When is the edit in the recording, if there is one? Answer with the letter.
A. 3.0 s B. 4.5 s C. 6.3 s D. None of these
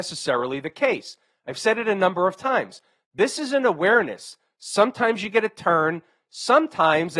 D